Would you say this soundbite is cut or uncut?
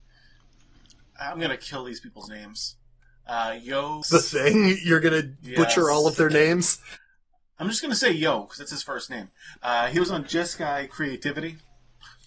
cut